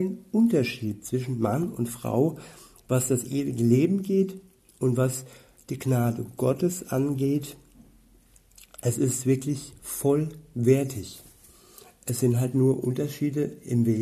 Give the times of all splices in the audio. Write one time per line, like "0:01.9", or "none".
none